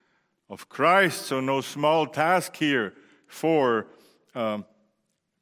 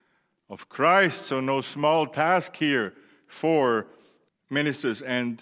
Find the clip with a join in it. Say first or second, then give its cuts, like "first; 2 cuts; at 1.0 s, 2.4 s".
second; 1 cut; at 4.3 s